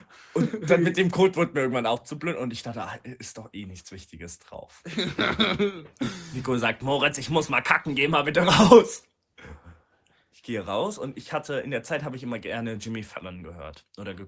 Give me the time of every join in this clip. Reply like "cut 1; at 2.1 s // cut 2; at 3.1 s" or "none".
none